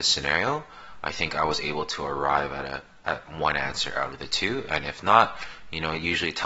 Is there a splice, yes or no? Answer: no